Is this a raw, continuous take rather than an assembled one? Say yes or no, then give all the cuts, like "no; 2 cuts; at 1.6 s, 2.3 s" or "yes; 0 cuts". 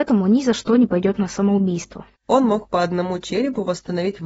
no; 1 cut; at 2.2 s